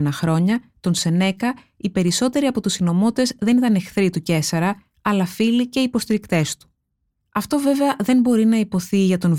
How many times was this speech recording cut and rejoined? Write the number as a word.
zero